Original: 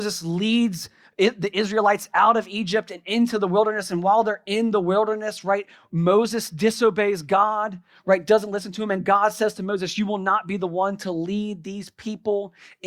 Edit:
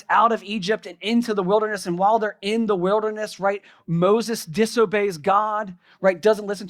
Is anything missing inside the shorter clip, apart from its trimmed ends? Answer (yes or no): no